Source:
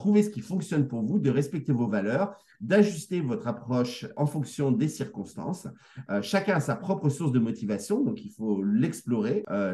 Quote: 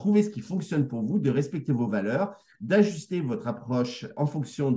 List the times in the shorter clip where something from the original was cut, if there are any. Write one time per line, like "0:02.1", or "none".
none

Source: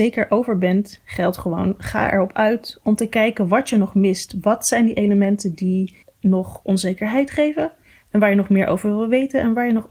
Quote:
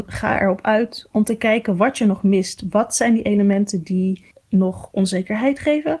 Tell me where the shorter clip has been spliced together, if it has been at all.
none

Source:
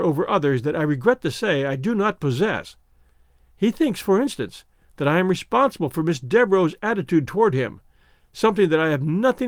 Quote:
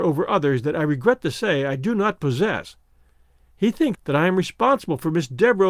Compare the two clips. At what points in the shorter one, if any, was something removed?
0:03.9

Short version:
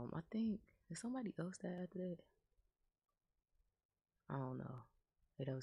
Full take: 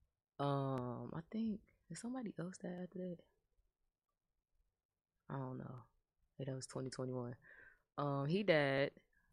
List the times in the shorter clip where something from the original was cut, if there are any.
none

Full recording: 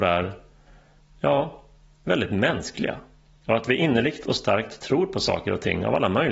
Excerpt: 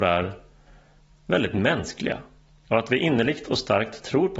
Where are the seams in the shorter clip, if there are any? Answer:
0:01.1

